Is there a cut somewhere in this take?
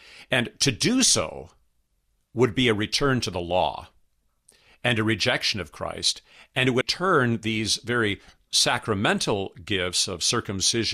yes; 1 cut; at 6.8 s

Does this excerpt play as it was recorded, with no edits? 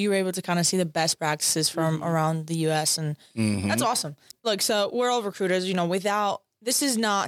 yes; 0 cuts

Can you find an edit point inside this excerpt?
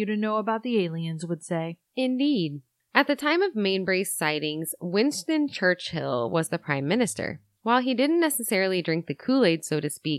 no; 0 cuts

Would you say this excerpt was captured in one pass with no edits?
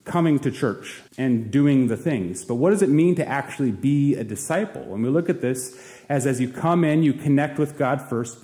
no; 1 cut; at 1.1 s

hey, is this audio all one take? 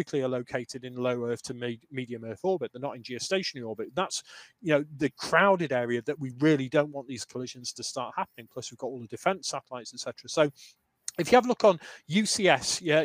yes; 0 cuts

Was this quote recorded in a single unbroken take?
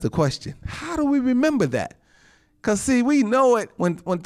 yes; 0 cuts

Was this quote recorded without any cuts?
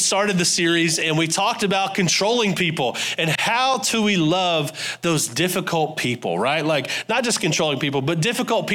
yes; 0 cuts

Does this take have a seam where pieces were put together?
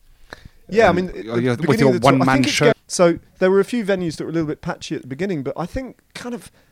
yes; 2 cuts; at 1.1 s, 2.7 s

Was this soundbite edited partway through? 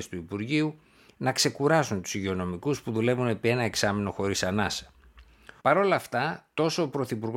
yes; 1 cut; at 5.6 s

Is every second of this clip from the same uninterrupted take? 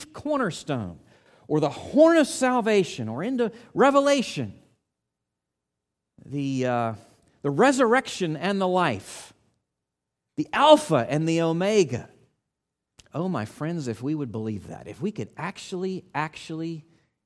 no; 1 cut; at 13.0 s

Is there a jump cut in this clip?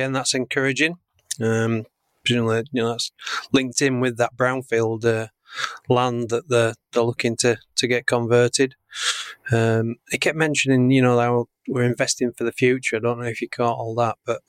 no; 0 cuts

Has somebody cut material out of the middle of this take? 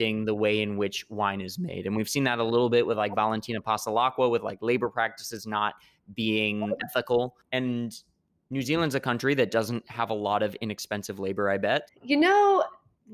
yes; 2 cuts; at 6.8 s, 11.9 s

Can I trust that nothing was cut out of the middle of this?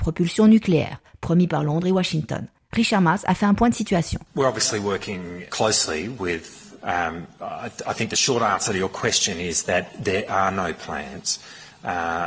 no; 2 cuts; at 5.5 s, 6.8 s

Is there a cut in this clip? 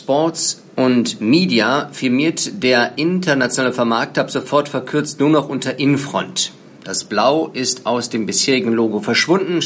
no; 0 cuts

